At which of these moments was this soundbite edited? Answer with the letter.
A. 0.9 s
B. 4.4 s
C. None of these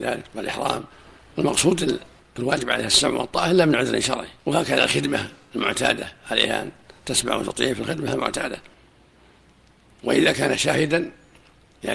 B